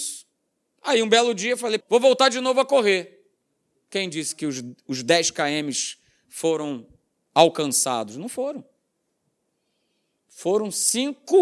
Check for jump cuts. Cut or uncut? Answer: cut